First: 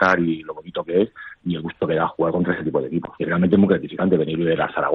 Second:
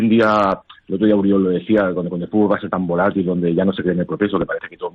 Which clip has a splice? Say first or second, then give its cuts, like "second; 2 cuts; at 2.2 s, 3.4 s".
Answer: first; 1 cut; at 3.2 s